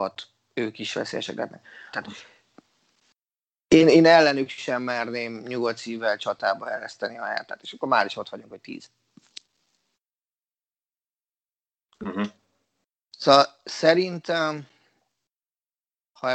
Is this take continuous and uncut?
no; 1 cut; at 1.9 s

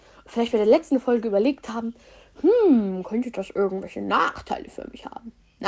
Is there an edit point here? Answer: no; 0 cuts

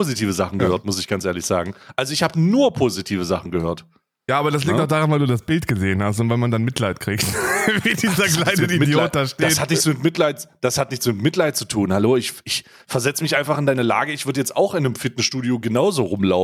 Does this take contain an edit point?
no; 0 cuts

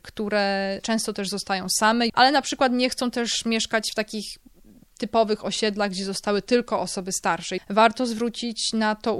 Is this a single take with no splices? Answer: no; 2 cuts; at 2.1 s, 7.6 s

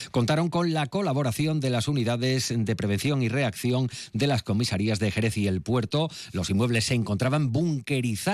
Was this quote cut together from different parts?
no; 0 cuts

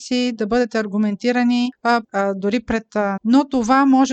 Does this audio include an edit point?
yes; 2 cuts; at 2.0 s, 3.2 s

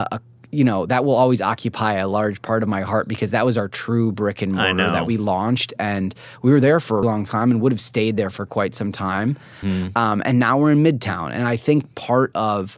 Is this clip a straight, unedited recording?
no; 2 cuts; at 7.0 s, 9.6 s

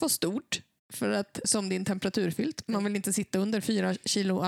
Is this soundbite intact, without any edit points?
no; 1 cut; at 1.4 s

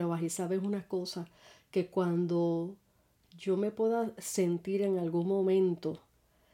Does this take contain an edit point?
no; 0 cuts

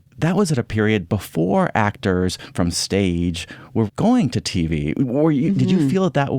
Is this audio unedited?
no; 1 cut; at 3.9 s

